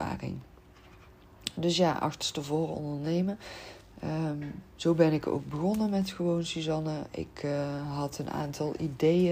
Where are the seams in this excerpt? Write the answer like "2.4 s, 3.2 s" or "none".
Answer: none